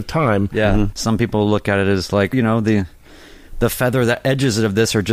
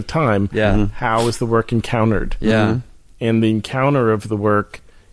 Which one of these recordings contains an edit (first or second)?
first